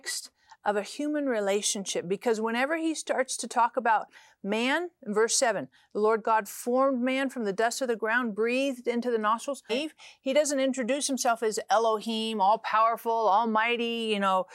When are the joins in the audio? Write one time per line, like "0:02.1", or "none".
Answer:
0:09.7